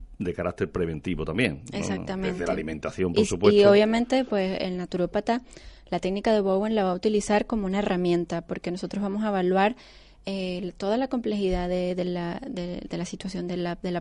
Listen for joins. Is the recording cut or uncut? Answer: uncut